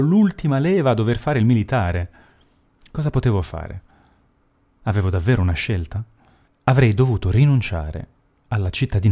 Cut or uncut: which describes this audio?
cut